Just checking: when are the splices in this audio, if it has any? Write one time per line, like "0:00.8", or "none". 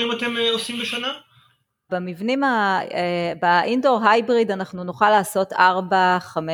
0:01.9